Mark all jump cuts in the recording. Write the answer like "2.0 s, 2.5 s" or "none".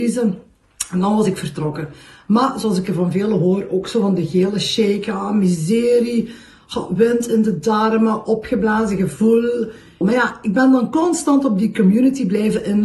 10.0 s